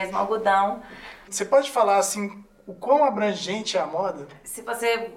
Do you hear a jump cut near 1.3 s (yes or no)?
yes